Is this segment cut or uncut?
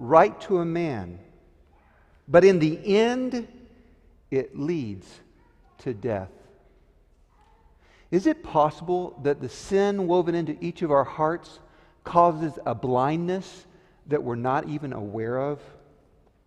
uncut